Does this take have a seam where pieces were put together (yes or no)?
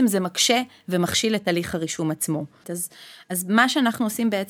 yes